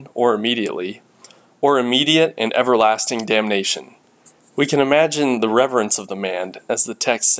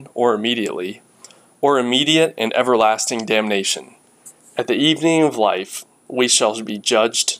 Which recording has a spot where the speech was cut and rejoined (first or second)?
first